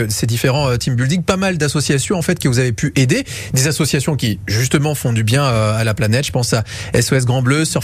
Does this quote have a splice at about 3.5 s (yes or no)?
no